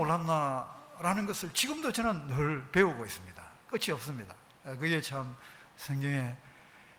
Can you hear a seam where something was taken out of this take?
no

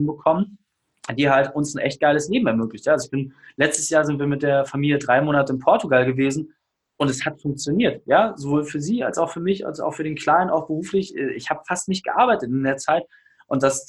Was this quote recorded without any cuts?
yes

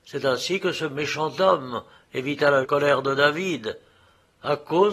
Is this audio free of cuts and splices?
no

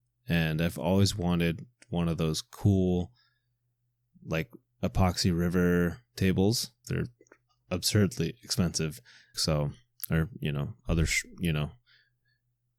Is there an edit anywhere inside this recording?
yes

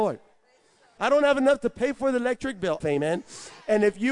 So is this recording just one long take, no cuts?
no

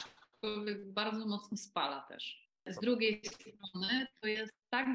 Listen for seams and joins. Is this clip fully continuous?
yes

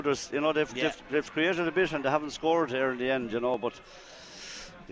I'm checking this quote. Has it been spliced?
no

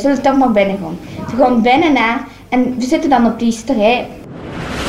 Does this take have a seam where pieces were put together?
no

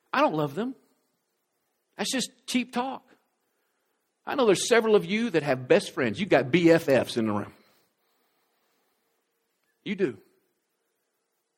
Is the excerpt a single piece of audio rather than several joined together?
yes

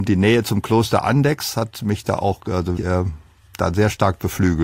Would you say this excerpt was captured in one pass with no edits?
no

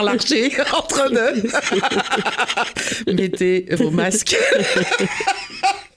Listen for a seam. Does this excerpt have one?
yes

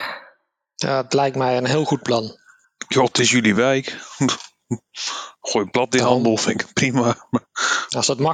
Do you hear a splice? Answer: no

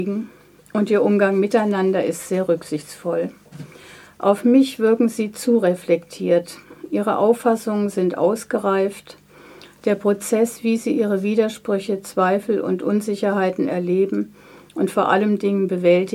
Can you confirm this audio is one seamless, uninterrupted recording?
yes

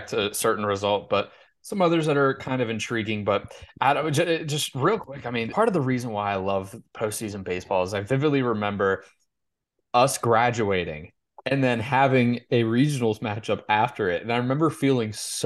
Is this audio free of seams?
no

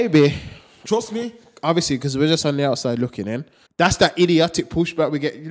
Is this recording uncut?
no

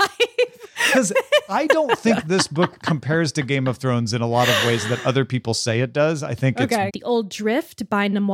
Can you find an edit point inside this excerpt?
yes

